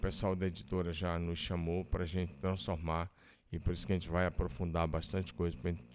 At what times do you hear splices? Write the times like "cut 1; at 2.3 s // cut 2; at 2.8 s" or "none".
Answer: none